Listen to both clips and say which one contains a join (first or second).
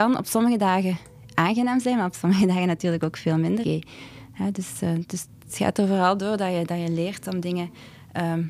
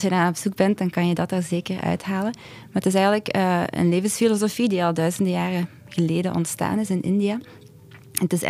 first